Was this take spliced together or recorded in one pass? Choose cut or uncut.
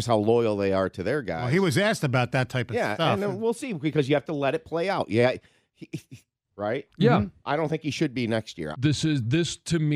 cut